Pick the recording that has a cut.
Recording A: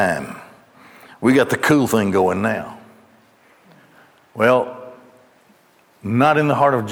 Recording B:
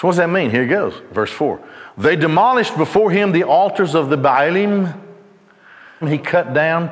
B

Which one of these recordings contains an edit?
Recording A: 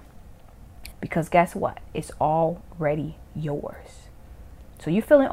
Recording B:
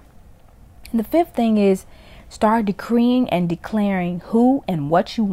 A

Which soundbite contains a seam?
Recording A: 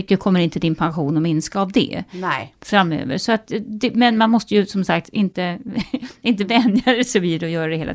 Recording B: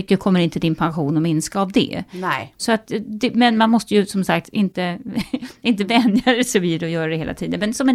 B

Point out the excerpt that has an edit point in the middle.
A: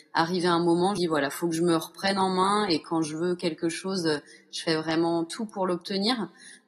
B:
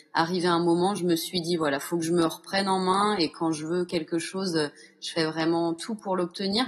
A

